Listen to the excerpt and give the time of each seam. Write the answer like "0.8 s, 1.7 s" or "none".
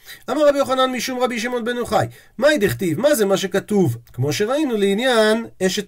4.0 s